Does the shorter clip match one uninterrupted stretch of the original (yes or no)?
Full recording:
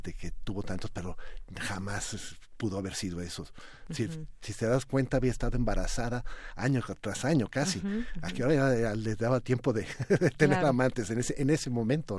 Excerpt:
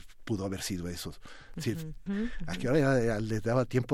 no